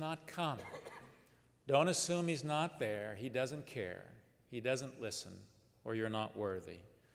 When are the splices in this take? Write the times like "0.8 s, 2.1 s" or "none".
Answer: none